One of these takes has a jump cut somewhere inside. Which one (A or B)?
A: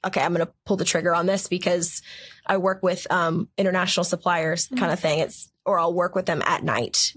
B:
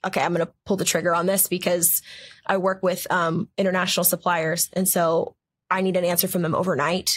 A